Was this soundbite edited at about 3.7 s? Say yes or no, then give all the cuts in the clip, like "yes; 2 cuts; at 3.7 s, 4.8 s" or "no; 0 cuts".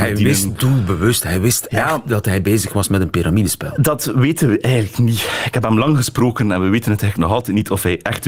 no; 0 cuts